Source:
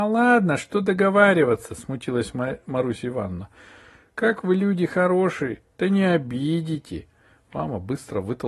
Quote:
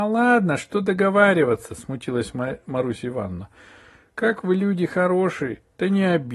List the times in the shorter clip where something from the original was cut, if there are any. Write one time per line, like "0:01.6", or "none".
none